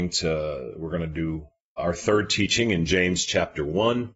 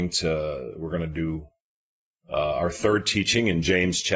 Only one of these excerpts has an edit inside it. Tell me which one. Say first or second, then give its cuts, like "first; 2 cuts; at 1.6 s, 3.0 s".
first; 1 cut; at 1.8 s